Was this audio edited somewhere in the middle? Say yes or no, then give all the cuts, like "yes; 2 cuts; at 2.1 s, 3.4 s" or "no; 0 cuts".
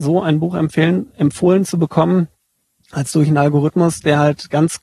no; 0 cuts